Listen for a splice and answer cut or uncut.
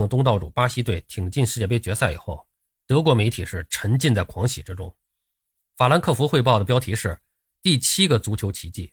uncut